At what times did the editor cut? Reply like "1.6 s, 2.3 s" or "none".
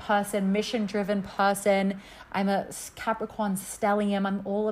none